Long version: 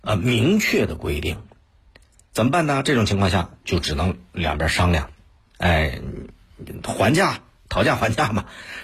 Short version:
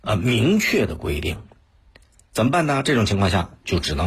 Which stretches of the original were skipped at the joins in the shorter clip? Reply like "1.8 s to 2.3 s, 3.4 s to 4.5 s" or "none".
none